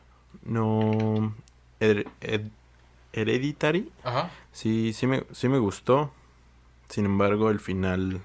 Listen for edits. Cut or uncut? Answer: uncut